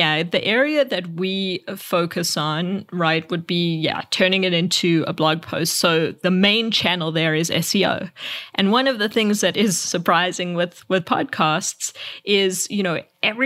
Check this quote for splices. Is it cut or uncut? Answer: uncut